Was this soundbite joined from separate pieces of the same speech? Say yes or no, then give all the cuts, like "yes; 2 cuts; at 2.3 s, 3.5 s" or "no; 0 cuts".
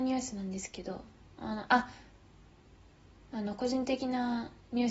no; 0 cuts